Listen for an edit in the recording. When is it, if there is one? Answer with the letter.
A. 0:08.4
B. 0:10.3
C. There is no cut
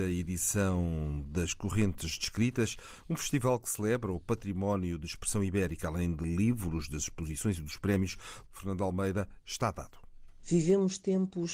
A